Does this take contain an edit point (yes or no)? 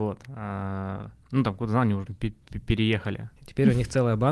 yes